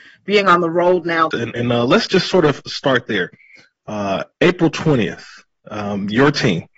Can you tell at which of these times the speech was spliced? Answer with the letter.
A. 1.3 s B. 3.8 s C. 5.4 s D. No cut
A